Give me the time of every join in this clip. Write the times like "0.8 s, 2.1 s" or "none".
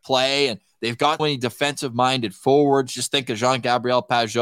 1.2 s